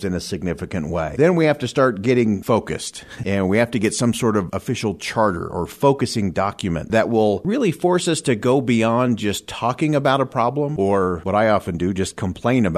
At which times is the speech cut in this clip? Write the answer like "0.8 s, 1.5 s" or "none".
none

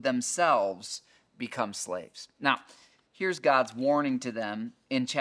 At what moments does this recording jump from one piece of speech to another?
none

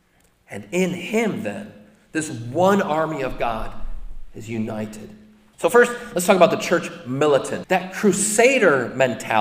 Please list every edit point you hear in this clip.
5.5 s, 7.6 s

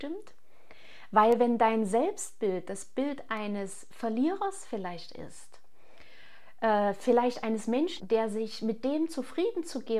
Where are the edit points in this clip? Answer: 8.0 s

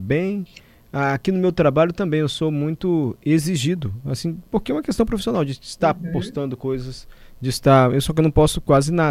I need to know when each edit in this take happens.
none

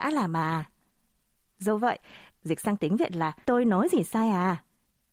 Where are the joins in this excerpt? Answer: 2.3 s, 3.4 s

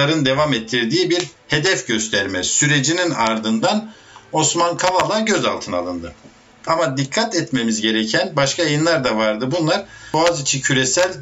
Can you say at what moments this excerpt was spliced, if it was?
6.7 s

